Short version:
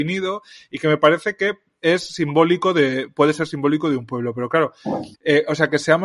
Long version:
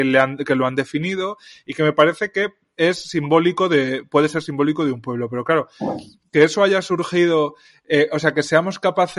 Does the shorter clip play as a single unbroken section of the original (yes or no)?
no